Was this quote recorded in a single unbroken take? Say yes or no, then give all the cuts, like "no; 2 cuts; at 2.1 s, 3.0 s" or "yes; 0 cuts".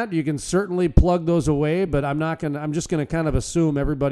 yes; 0 cuts